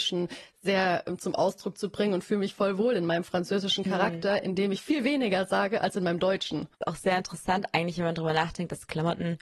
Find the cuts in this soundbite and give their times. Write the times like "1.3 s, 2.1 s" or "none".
6.7 s

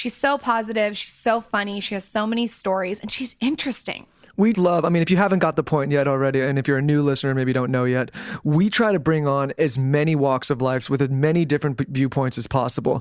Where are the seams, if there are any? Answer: 4.5 s

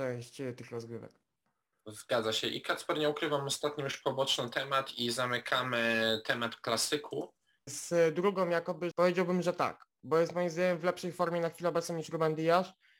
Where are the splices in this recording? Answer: 7.7 s, 8.9 s

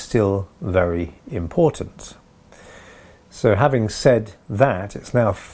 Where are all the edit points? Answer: none

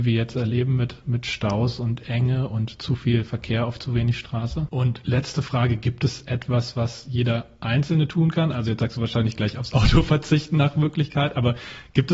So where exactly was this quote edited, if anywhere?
4.7 s

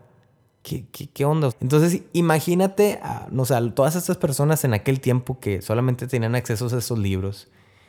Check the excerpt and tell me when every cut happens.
1.5 s

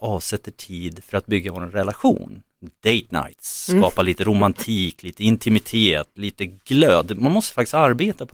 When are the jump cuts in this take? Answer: none

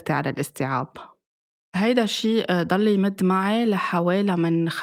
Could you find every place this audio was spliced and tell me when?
none

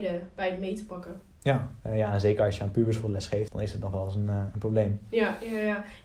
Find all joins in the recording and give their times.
1.8 s, 3.5 s

